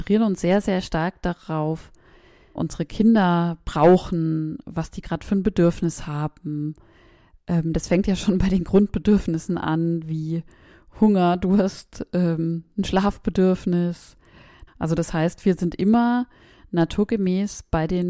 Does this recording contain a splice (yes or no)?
yes